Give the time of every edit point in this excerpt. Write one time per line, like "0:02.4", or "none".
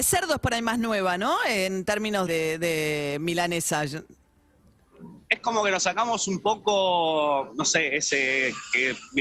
0:02.3